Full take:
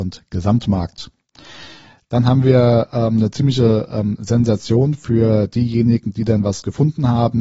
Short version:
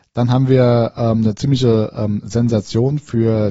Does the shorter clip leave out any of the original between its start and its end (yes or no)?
no